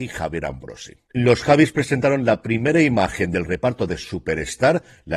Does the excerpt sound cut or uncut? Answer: uncut